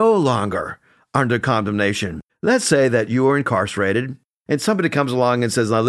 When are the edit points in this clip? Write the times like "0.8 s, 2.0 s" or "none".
2.3 s